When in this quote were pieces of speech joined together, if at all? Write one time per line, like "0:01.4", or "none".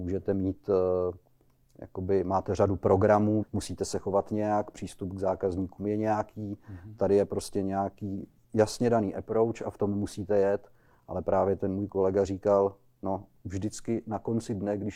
0:03.4